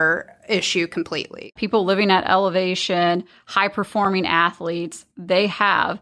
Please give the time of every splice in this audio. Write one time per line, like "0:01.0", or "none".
0:01.6